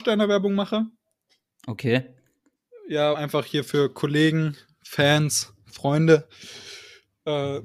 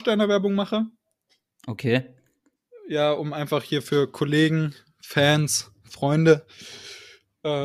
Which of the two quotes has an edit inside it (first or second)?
first